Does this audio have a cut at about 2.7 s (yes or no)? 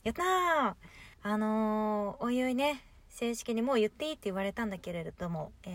no